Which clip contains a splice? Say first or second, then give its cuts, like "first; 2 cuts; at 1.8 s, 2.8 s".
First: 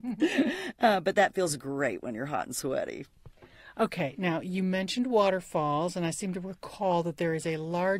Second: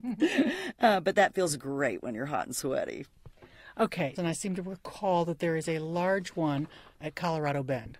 second; 1 cut; at 4.2 s